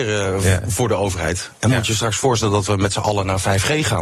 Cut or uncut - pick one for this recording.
uncut